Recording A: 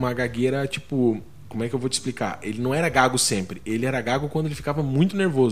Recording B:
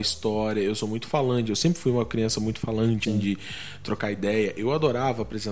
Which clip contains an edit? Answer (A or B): B